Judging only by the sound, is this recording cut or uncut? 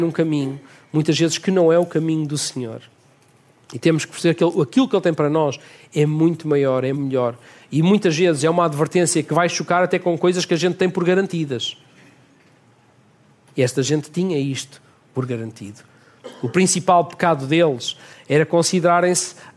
cut